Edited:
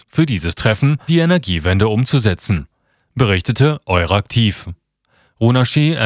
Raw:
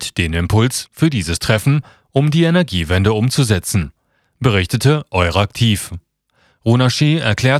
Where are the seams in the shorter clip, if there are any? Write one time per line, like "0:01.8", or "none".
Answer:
0:01.1